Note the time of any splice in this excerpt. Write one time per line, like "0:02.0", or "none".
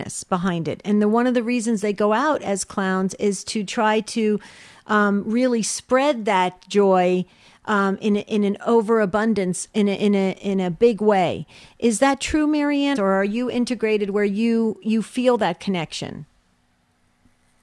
0:13.0